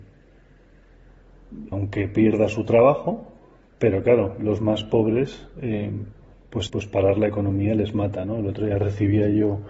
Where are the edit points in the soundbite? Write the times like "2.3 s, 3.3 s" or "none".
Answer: 1.7 s, 6.7 s